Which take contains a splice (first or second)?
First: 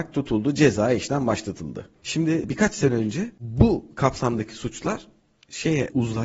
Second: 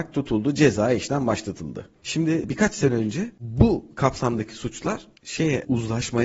second